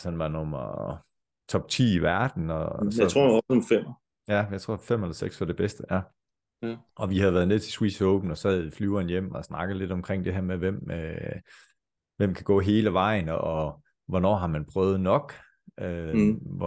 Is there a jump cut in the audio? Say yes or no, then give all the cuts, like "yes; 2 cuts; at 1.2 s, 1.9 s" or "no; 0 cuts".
no; 0 cuts